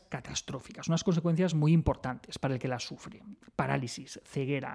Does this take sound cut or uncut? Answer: uncut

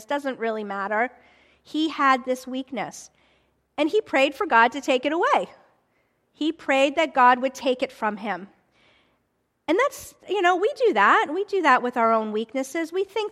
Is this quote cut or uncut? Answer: uncut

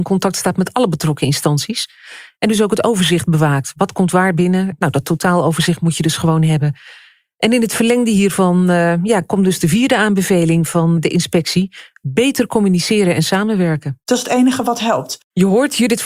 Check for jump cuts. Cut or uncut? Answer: uncut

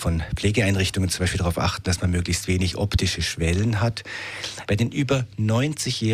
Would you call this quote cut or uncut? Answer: cut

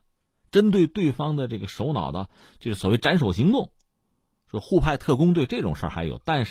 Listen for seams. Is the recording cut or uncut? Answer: uncut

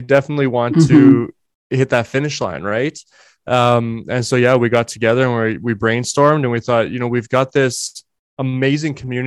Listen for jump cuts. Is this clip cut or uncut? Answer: uncut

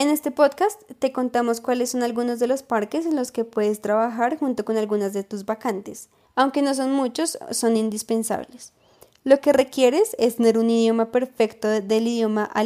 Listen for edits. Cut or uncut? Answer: cut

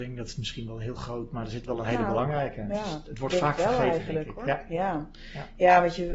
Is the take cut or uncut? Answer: uncut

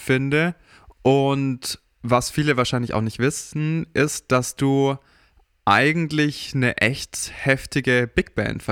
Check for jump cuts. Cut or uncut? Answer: uncut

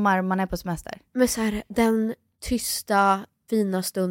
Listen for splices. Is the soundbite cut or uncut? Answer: uncut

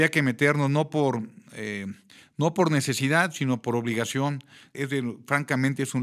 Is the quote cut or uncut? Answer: cut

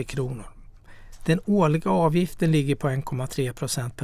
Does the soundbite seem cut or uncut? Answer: uncut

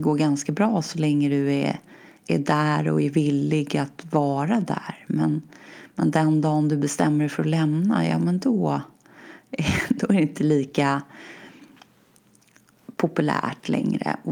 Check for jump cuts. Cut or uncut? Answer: uncut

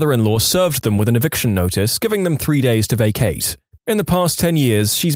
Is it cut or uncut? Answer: cut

